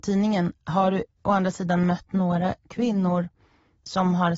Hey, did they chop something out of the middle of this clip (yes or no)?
no